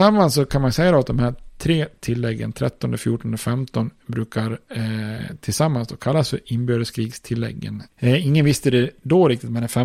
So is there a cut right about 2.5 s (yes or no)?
no